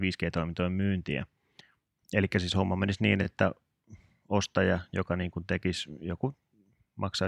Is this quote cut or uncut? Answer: uncut